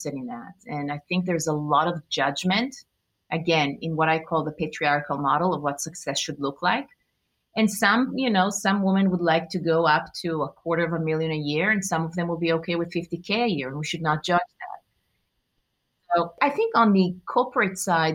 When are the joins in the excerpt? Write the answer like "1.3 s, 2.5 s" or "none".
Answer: none